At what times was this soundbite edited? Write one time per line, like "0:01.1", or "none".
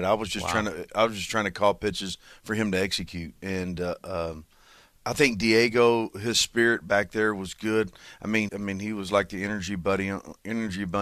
0:08.5

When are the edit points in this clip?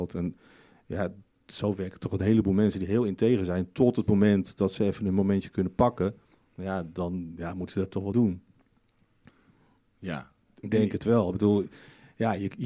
0:08.1

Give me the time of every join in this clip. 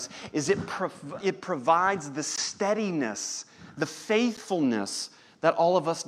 0:01.2

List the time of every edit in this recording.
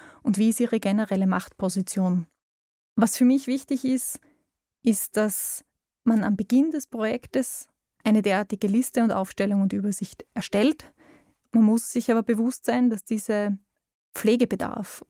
none

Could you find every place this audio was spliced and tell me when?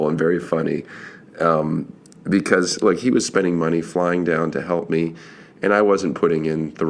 none

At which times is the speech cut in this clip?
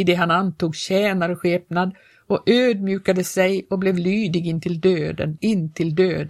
0:05.4

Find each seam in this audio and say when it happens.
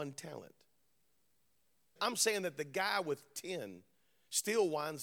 0:02.0

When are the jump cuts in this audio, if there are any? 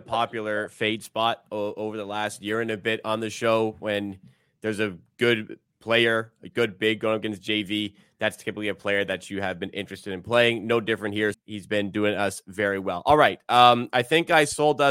0:11.3

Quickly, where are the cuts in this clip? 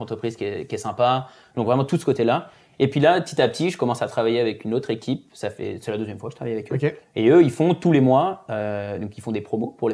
none

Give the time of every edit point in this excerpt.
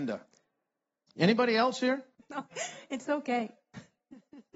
0:02.1

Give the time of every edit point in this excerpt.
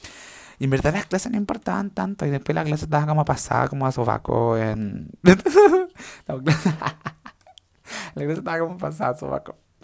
none

